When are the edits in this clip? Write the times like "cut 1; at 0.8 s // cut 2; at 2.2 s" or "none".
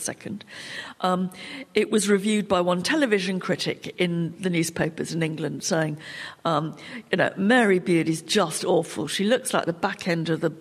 none